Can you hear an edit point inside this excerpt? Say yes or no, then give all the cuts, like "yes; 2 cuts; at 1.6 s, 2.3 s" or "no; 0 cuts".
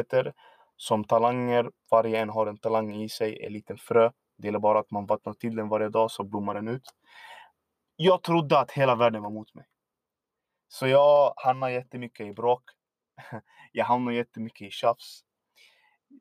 no; 0 cuts